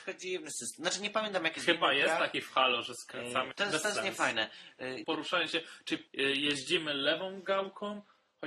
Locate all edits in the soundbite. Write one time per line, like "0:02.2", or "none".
0:03.5
0:05.0
0:06.1